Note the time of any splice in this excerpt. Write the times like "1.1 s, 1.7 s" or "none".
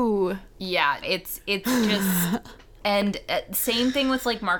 1.0 s